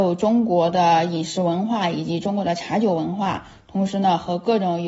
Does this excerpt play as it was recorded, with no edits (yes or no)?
yes